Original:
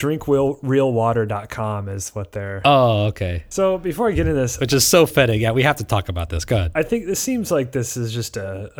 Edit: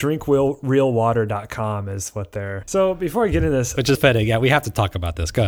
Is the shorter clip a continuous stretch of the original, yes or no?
no